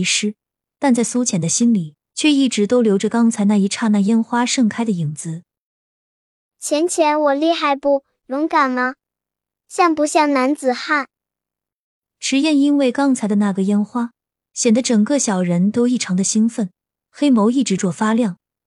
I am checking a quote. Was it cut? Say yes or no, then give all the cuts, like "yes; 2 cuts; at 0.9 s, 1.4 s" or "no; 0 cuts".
yes; 1 cut; at 17.8 s